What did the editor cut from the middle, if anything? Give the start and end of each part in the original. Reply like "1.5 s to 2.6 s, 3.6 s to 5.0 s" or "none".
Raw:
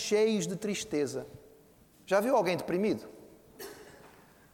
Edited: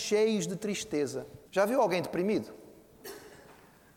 1.5 s to 2.0 s

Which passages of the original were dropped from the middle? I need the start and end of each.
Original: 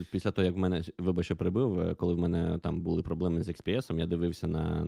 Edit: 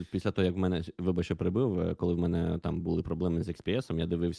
none

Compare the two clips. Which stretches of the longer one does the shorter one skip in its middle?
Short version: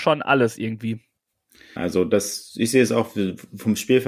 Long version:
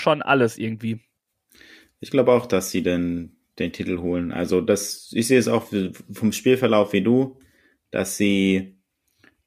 1.8 s to 4.3 s

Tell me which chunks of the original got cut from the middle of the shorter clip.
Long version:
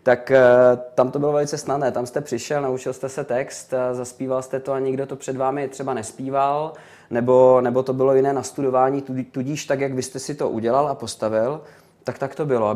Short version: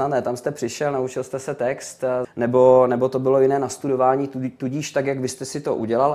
3.9 s to 7.0 s

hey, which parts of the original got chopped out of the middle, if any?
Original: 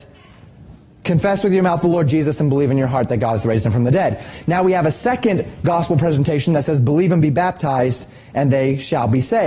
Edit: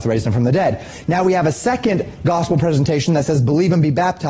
none

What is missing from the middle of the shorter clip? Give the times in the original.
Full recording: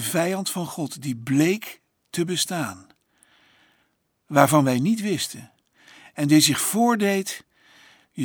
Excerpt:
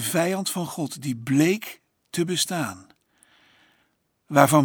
none

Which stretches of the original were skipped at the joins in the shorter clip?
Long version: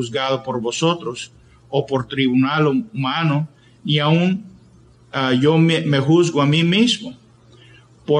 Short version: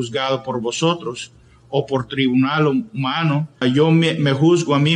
3.6 s to 5.3 s

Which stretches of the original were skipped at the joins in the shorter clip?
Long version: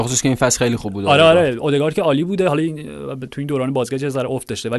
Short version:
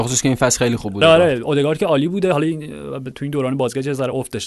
1.0 s to 1.2 s

